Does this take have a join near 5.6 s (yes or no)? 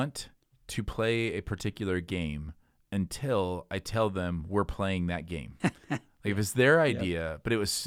yes